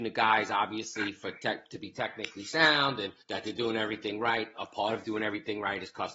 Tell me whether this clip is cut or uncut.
cut